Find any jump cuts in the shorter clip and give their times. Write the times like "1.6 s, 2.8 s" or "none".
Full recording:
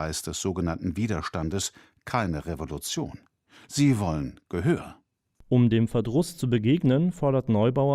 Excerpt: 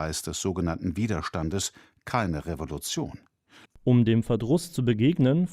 3.7 s